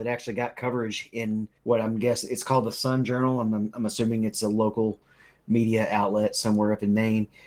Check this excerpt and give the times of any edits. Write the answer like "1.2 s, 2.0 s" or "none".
1.6 s